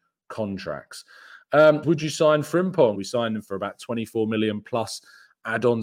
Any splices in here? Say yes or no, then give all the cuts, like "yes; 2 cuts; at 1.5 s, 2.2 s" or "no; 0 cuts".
yes; 2 cuts; at 1.8 s, 2.9 s